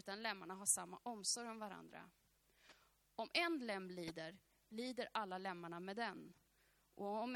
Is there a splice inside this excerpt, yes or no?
no